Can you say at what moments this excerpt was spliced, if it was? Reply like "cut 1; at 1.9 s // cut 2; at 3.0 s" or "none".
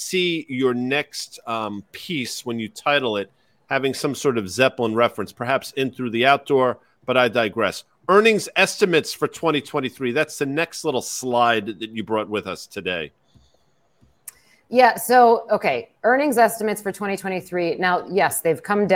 none